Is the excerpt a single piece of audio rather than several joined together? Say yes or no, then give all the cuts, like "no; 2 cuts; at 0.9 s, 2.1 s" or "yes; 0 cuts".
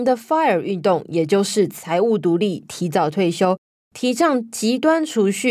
yes; 0 cuts